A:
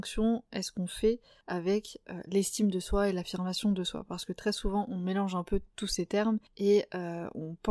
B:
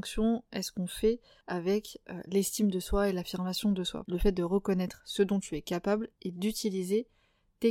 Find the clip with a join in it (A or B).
B